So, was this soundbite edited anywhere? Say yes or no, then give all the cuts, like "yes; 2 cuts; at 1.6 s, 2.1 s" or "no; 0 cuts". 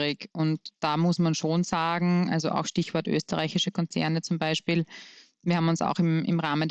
no; 0 cuts